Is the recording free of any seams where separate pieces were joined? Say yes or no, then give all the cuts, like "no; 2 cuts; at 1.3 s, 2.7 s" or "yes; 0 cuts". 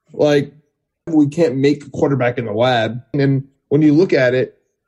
no; 2 cuts; at 1.1 s, 3.1 s